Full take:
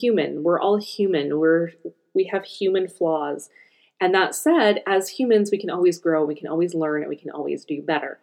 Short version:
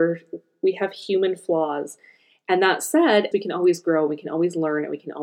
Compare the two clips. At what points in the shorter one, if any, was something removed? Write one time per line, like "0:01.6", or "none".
0:03.3